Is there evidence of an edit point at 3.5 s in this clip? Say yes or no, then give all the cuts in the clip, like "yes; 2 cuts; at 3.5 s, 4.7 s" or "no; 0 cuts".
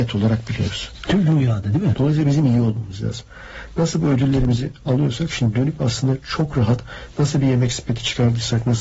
no; 1 cut; at 1.9 s